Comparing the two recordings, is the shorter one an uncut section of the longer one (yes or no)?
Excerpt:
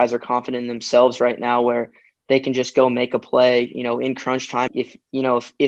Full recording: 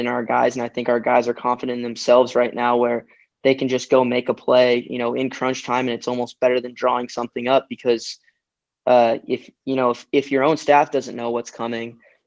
no